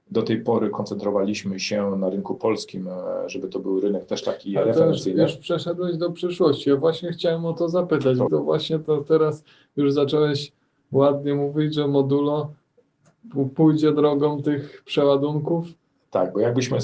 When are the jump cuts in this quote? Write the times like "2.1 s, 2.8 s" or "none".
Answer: 8.3 s